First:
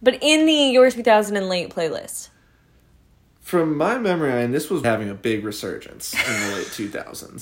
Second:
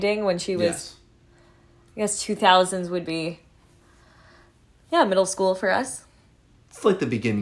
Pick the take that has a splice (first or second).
first